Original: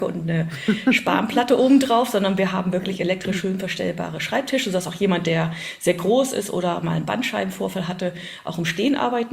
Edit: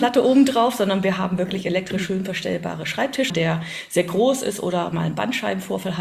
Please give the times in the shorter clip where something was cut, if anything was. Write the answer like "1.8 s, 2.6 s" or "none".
3.3 s

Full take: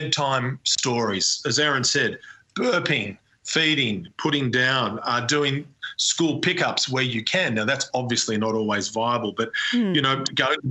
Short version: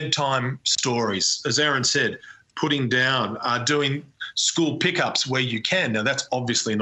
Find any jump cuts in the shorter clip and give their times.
2.5 s

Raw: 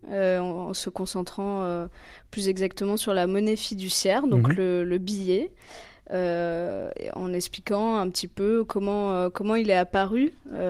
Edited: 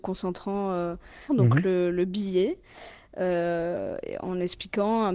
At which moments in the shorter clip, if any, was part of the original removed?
1.3 s

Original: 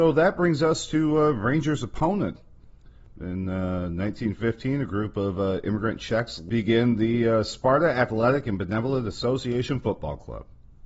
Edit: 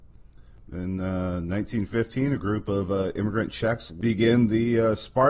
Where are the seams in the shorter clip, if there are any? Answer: none

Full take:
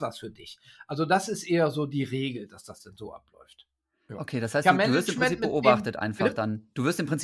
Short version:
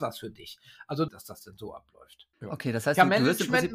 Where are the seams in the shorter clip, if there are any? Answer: 1.1 s, 2.3 s

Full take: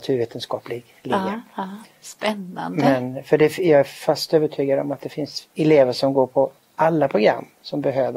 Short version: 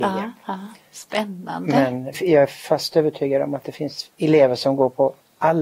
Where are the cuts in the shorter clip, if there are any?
2.1 s

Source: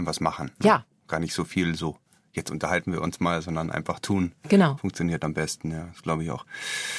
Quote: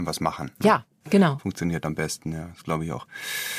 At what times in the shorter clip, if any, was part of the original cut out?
1.0 s

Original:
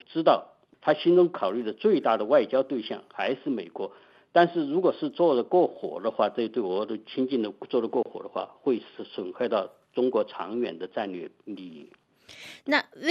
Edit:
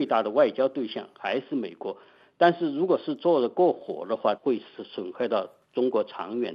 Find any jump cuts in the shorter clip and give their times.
4.4 s

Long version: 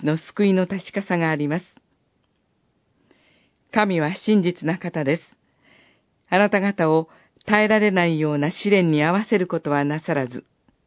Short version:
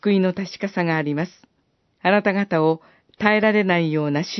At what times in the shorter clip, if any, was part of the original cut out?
1.8 s

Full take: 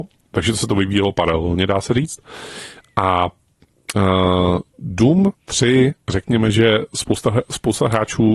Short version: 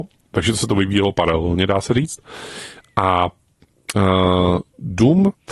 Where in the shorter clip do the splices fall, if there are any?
none

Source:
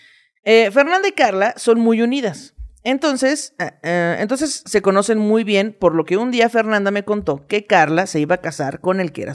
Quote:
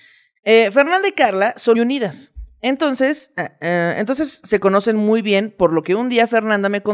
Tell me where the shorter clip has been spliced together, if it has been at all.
1.7 s

